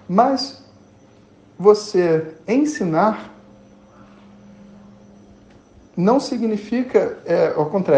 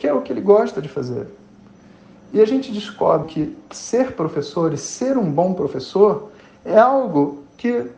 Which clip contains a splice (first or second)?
second